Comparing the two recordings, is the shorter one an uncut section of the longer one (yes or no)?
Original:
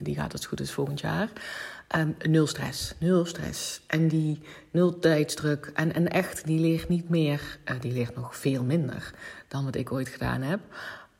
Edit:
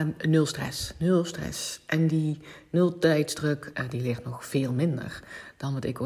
no